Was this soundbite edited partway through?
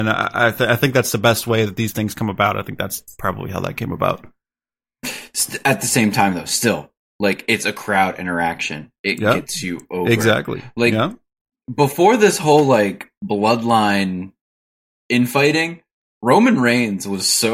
no; 0 cuts

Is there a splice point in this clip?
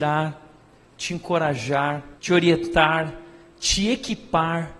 yes; 1 cut; at 2.1 s

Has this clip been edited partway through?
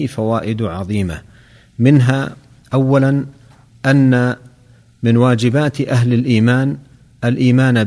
no; 0 cuts

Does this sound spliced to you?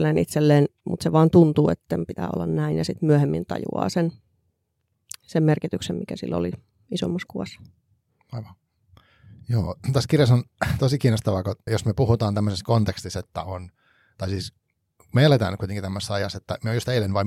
yes; 1 cut; at 11.7 s

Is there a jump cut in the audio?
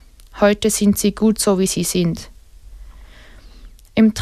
no; 0 cuts

